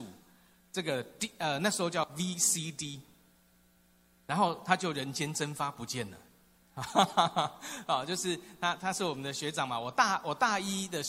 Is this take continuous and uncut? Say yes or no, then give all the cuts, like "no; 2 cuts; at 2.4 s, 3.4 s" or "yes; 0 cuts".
yes; 0 cuts